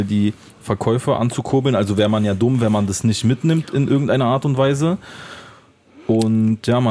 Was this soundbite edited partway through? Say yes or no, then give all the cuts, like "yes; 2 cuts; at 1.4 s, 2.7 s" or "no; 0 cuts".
no; 0 cuts